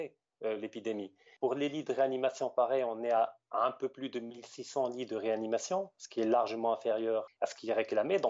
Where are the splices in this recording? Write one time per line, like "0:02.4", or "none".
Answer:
0:01.4
0:07.3